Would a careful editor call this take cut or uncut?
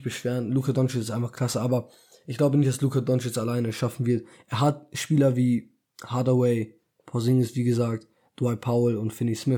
uncut